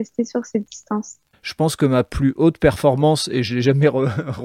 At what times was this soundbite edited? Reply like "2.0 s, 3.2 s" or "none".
1.3 s

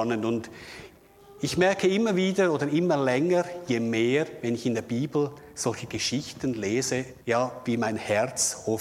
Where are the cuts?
7.2 s

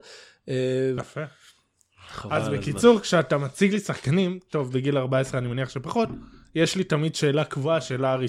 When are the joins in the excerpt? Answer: 1.0 s

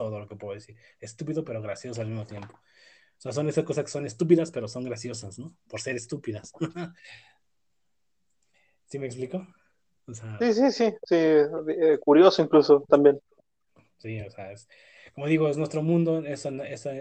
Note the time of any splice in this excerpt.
none

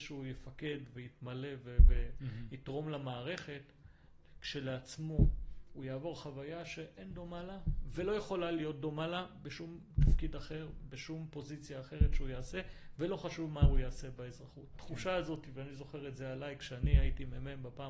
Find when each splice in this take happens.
14.7 s

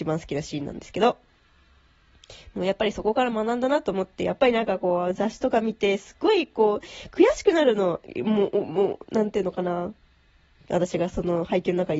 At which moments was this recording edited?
10.6 s

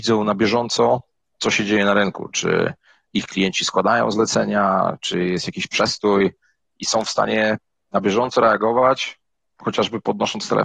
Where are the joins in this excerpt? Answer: none

